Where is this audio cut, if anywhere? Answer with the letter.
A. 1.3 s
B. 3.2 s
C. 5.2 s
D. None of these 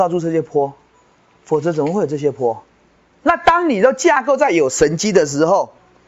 B